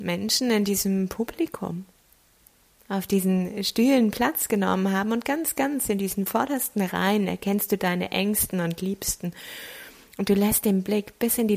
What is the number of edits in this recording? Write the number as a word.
zero